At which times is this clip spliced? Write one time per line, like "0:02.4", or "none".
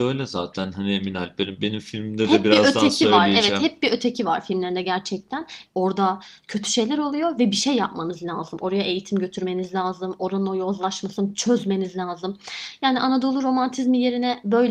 0:05.7